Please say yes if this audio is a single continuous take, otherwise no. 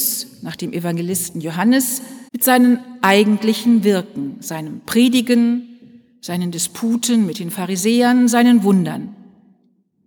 no